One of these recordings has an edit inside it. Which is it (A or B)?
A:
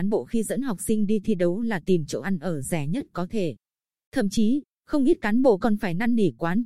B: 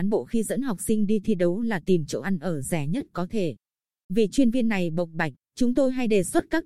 B